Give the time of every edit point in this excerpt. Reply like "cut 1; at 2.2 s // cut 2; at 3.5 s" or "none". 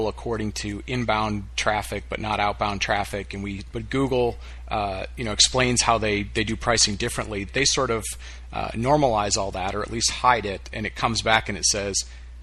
cut 1; at 3.7 s // cut 2; at 7.5 s // cut 3; at 10.7 s